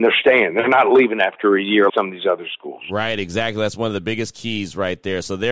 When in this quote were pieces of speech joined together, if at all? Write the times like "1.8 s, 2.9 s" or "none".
1.9 s